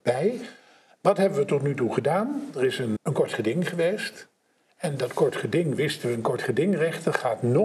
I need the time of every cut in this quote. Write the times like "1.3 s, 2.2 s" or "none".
3.0 s